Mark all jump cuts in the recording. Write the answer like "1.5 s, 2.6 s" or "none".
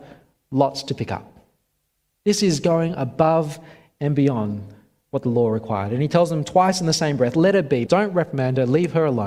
7.9 s